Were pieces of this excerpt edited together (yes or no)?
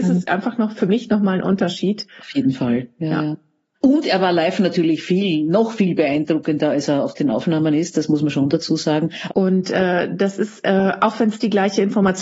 yes